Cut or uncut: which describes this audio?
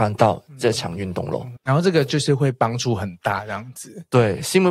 cut